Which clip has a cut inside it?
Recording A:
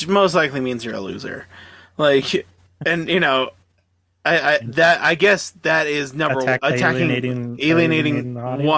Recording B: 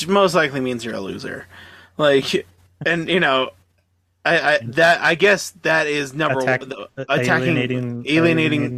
A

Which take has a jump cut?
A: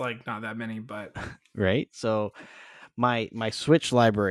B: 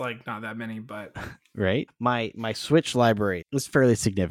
B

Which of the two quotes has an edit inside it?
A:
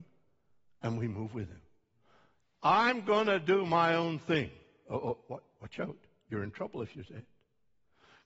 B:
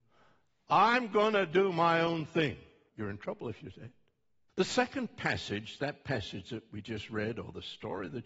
B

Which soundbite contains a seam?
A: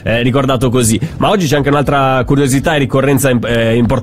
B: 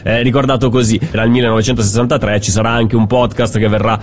B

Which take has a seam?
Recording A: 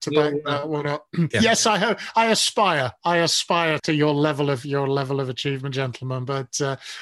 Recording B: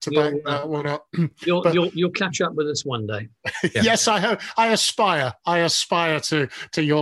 A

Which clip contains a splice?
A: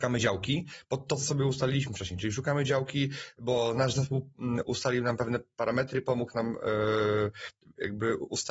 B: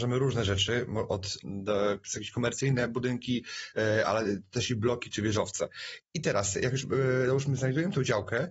B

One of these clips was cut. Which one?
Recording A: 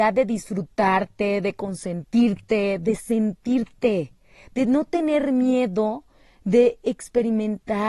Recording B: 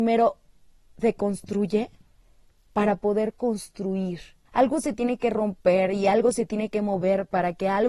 B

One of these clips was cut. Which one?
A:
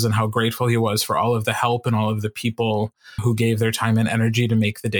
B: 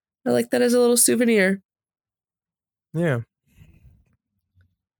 A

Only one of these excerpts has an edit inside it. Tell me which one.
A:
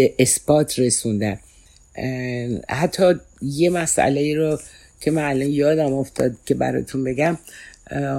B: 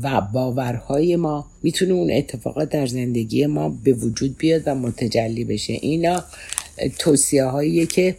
B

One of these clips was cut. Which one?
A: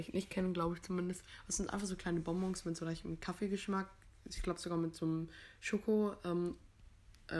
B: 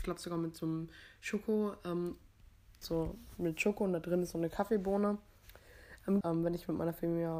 B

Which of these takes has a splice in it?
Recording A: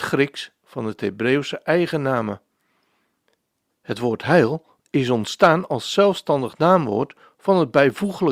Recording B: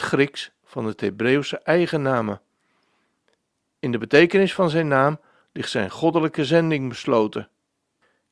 A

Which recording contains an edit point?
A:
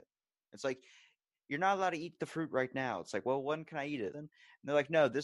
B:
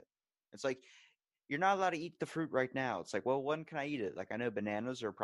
A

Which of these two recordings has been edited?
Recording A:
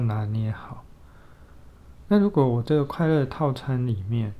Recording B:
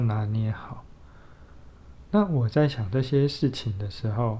A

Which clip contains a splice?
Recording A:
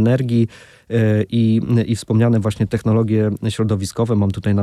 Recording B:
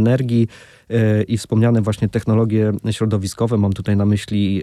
B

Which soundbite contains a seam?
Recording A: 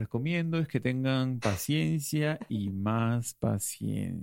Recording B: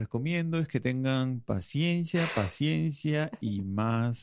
A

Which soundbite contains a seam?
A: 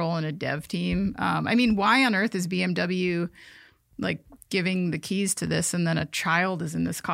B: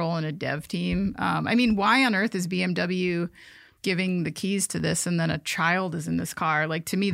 B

